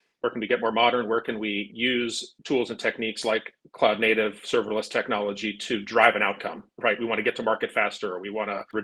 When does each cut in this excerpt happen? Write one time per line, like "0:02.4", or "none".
0:01.7

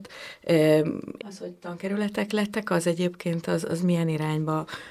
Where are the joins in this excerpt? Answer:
0:01.2

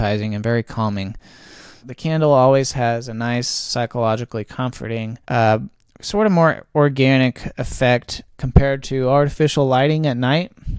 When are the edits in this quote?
0:01.8
0:05.2

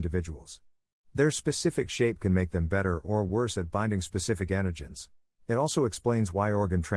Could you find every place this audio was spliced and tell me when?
0:05.4

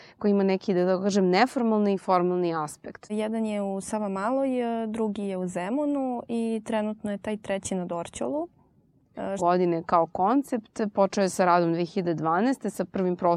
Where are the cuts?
0:03.1
0:09.4

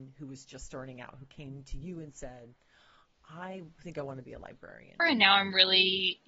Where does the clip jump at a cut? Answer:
0:05.0

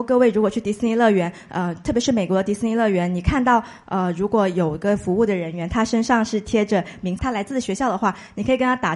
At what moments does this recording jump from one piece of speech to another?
0:07.2

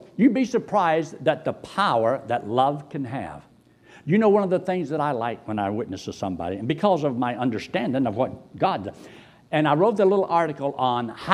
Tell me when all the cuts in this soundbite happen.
none

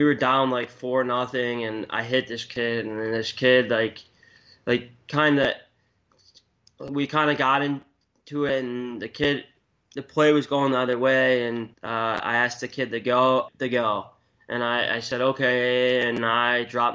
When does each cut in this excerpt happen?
0:11.7
0:13.5

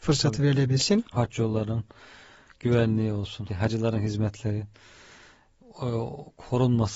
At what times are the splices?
0:01.1
0:03.5

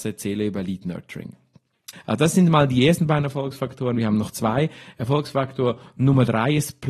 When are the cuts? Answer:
0:01.9

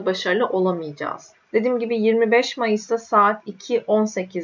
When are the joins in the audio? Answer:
0:01.3

